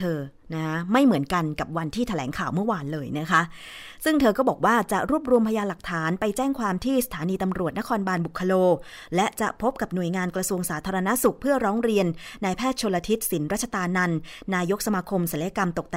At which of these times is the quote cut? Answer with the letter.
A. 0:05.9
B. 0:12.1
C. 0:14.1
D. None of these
D